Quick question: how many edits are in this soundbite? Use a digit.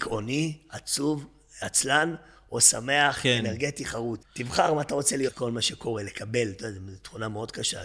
2